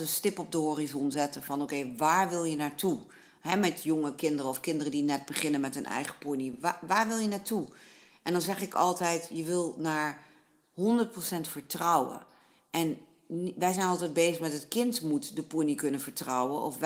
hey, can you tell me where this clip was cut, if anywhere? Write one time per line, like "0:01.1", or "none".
none